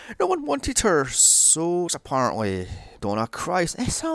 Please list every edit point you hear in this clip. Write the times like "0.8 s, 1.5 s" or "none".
1.9 s, 3.0 s